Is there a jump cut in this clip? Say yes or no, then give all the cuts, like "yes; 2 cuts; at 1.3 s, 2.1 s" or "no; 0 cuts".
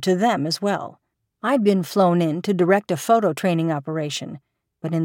yes; 1 cut; at 1.3 s